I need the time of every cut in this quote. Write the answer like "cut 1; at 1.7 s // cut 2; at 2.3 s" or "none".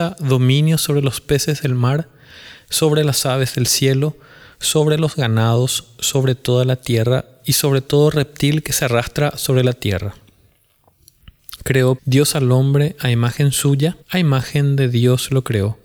cut 1; at 12.0 s // cut 2; at 14.0 s